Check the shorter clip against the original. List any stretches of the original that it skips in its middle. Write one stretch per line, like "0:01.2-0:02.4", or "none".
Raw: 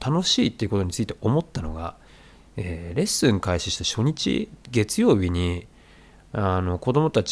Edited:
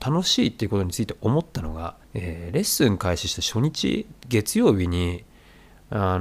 0:02.0-0:02.5

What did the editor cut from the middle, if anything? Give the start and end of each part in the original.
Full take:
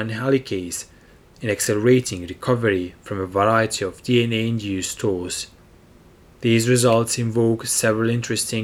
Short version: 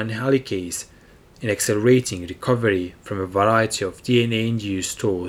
none

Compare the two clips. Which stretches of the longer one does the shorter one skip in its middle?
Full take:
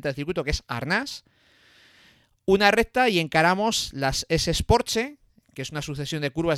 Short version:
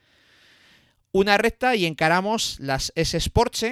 none

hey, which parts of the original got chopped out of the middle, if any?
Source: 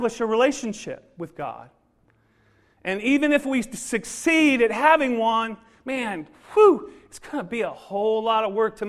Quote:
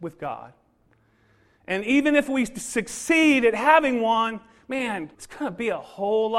0:06.3-0:07.1

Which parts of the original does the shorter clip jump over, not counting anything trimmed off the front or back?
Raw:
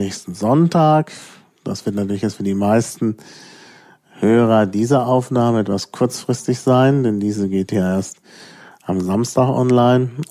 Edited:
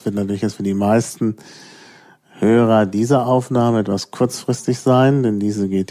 none

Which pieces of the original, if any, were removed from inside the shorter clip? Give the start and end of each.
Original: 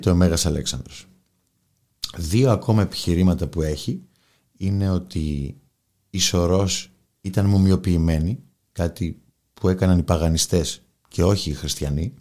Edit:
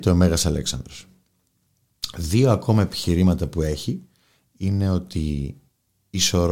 none

